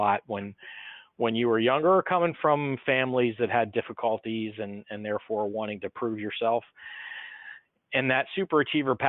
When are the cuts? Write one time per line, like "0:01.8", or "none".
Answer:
none